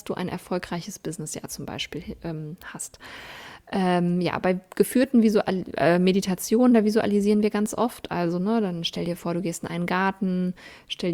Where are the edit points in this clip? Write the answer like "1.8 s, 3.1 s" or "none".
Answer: none